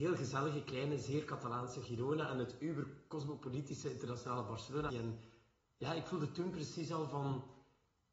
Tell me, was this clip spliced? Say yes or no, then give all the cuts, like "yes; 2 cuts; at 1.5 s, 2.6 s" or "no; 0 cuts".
yes; 1 cut; at 4.9 s